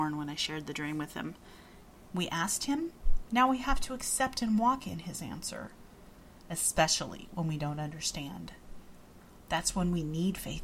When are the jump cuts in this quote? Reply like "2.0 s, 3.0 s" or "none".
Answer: 2.1 s